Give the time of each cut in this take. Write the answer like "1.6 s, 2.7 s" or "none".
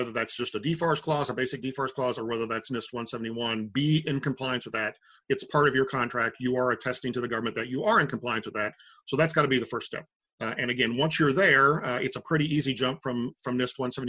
none